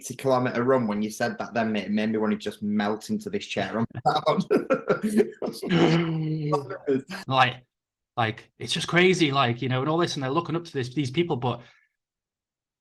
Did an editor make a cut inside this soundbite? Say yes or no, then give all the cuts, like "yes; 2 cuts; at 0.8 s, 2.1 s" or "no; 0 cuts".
yes; 1 cut; at 7.2 s